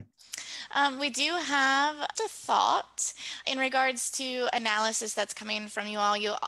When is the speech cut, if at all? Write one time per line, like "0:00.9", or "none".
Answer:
0:02.2
0:03.4